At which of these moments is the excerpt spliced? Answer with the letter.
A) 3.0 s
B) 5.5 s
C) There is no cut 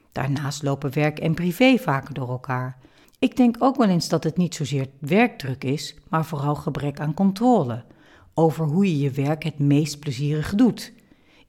A